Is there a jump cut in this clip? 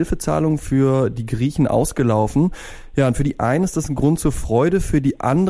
no; 0 cuts

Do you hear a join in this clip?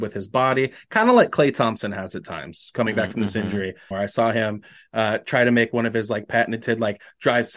yes; 1 cut; at 3.9 s

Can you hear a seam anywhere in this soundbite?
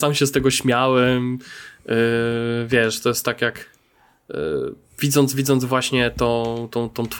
no; 0 cuts

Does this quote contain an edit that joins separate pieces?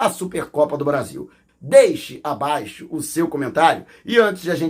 yes; 1 cut; at 1.5 s

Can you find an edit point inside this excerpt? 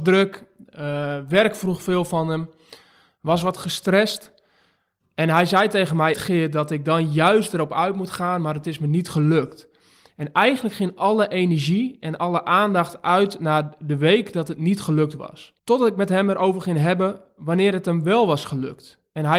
yes; 2 cuts; at 6.1 s, 15.6 s

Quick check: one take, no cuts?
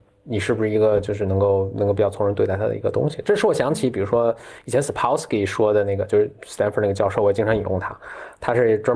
yes; 0 cuts

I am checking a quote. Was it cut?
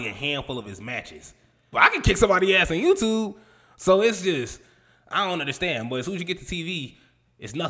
yes; 1 cut; at 1.7 s

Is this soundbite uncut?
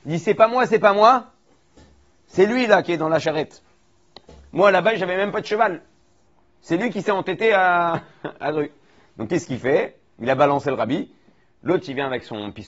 yes; 0 cuts

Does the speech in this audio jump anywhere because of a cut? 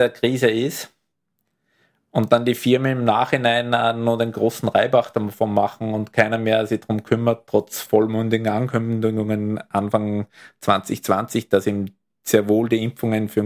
no; 0 cuts

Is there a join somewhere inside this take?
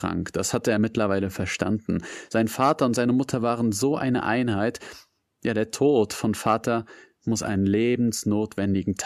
no; 0 cuts

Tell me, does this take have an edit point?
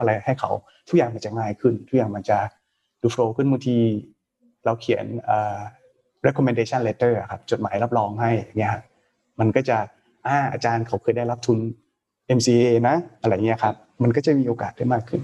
no; 0 cuts

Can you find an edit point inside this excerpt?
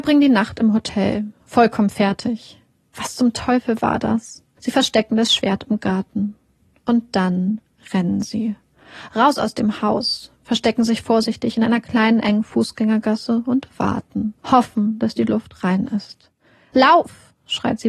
yes; 3 cuts; at 4.6 s, 14.4 s, 16.7 s

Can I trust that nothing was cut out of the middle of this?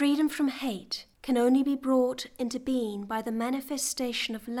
no; 1 cut; at 1.1 s

